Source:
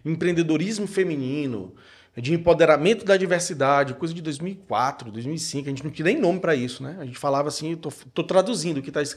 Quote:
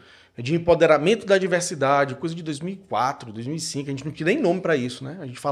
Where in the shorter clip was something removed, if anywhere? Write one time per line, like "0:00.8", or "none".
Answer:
none